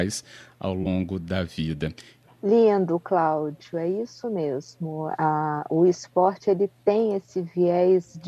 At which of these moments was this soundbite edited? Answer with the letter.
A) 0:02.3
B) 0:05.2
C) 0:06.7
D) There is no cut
A